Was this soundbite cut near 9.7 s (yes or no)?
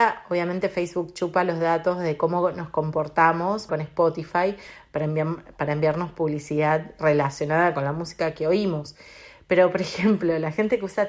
no